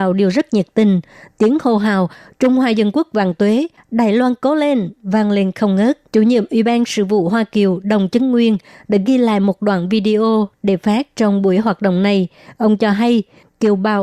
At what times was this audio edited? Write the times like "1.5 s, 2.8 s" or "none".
6.1 s